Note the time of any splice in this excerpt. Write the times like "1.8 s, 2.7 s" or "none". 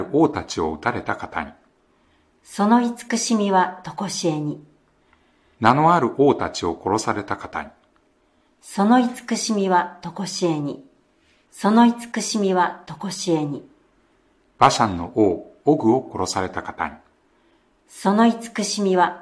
11.4 s